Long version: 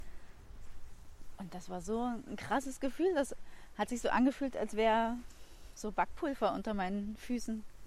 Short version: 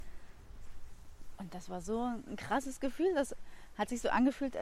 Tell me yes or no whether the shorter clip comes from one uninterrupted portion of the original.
yes